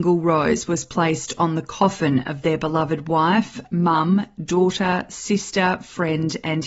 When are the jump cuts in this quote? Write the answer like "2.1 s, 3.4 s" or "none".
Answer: none

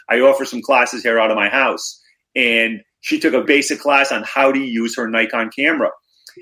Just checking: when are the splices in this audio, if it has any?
3.5 s

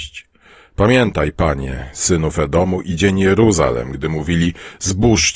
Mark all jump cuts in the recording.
none

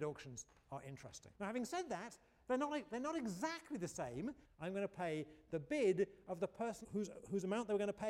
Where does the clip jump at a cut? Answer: 1.3 s, 4.4 s, 6.8 s

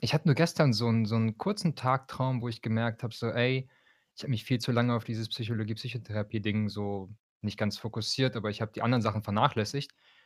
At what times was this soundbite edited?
none

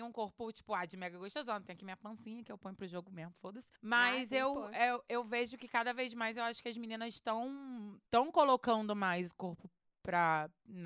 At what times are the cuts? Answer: 3.8 s, 8.1 s

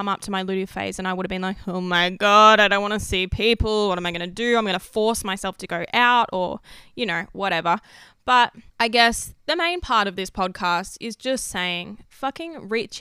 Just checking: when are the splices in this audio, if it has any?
8.7 s

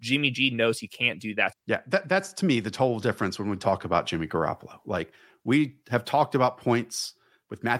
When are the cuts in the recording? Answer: 1.5 s

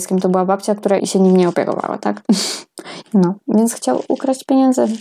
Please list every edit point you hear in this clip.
1.0 s, 3.0 s

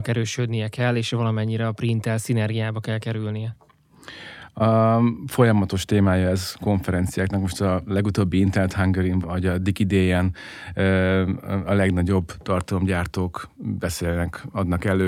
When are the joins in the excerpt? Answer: 9.2 s

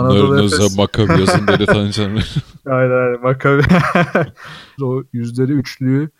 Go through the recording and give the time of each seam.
4.8 s

